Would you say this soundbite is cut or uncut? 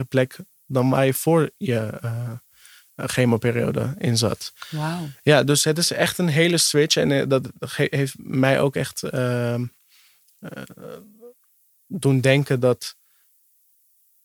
uncut